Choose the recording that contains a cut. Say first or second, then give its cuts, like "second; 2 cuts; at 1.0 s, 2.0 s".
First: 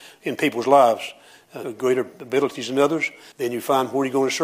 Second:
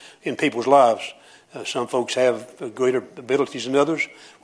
first; 2 cuts; at 1.6 s, 3.3 s